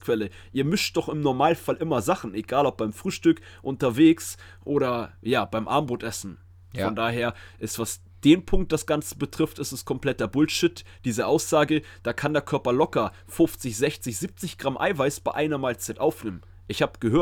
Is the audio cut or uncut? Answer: uncut